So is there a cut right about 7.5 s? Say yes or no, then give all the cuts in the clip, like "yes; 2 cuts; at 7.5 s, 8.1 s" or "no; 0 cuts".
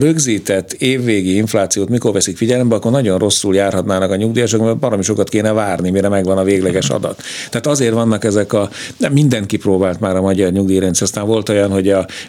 no; 1 cut; at 11.0 s